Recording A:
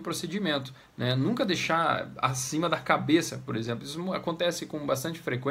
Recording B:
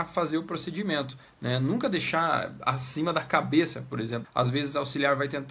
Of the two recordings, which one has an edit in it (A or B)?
B